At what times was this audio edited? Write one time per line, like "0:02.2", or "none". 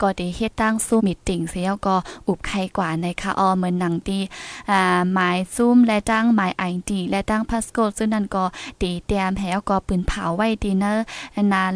0:01.0